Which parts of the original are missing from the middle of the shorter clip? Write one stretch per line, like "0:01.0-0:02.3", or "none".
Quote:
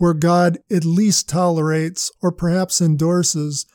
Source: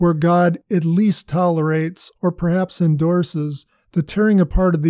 none